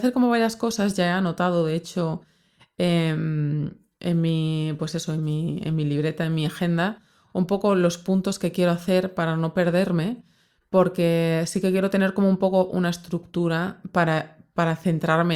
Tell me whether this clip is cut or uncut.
uncut